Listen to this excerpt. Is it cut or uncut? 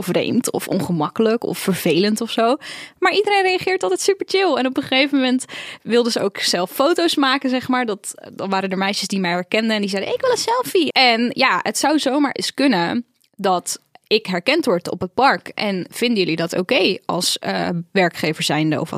cut